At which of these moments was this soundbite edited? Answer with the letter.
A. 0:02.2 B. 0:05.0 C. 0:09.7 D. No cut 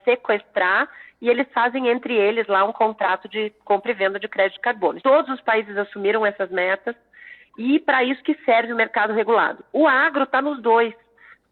B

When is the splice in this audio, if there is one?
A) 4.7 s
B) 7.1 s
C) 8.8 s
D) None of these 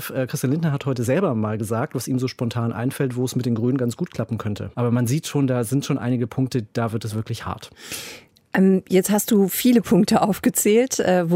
A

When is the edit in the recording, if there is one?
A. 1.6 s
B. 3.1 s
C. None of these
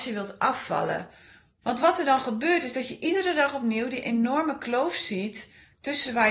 A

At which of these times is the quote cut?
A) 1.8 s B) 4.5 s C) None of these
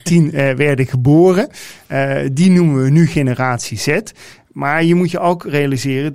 C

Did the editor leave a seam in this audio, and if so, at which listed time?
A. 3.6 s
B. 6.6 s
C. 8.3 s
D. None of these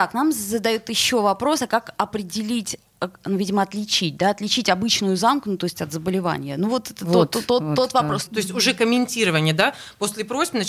C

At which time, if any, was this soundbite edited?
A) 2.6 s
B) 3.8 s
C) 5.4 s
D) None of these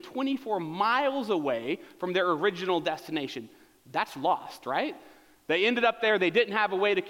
D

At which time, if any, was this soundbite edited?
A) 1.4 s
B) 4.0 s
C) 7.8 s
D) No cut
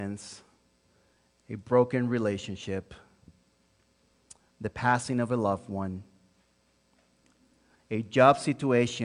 C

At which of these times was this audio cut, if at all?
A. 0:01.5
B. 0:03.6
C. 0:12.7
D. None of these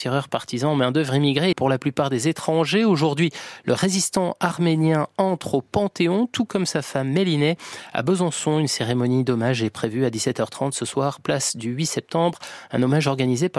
A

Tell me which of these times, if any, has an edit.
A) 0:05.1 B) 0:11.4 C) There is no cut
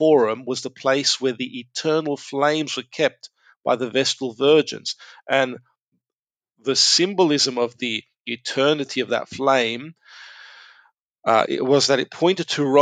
B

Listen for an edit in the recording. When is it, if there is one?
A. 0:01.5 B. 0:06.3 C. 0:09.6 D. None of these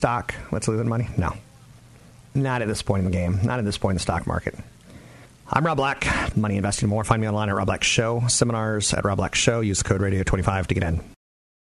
B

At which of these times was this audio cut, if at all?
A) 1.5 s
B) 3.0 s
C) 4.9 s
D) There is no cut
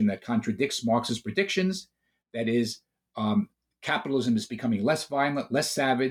D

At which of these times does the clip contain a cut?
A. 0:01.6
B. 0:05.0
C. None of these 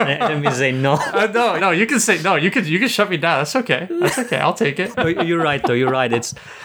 A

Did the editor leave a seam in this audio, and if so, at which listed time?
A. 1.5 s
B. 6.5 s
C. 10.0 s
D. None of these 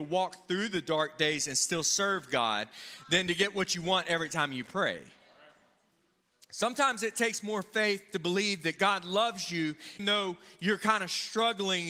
C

